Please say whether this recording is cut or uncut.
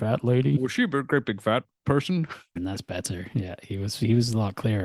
cut